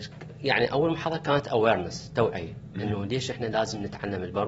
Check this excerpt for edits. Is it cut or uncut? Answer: uncut